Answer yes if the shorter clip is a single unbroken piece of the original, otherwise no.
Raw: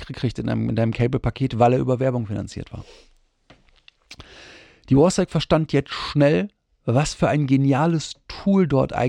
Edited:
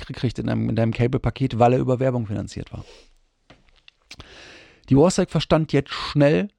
yes